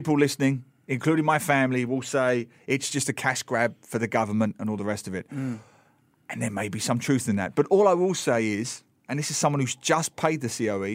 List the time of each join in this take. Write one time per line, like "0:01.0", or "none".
none